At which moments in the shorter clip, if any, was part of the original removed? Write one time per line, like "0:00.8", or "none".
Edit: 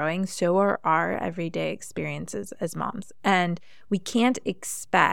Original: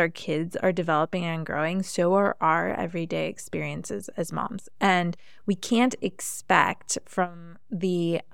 none